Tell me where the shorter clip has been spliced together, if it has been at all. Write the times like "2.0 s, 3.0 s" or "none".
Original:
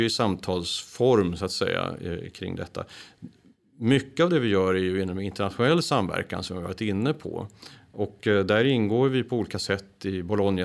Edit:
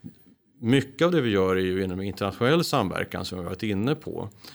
none